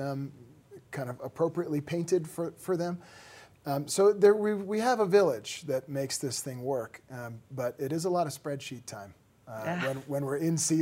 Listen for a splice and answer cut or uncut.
uncut